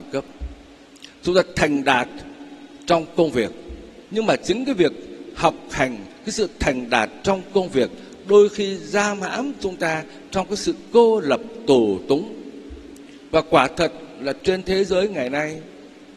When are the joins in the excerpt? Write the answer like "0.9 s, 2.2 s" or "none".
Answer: 4.0 s